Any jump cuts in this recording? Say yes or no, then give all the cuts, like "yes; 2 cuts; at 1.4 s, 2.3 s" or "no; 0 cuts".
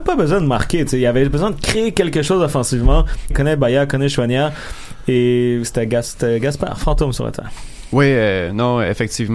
yes; 1 cut; at 3.3 s